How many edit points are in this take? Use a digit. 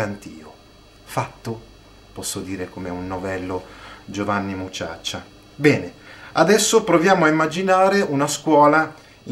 0